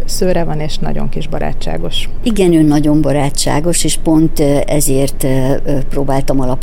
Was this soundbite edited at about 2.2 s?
yes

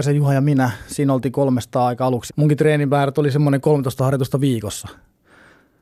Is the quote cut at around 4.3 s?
no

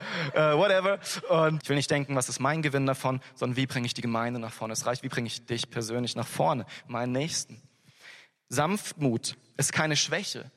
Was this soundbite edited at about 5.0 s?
no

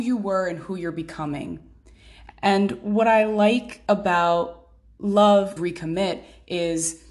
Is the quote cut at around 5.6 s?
yes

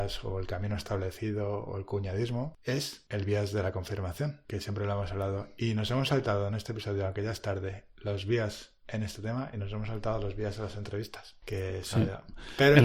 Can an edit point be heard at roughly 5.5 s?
no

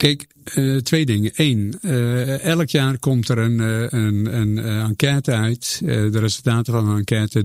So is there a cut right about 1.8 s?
no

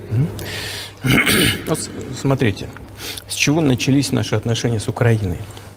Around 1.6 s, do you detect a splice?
no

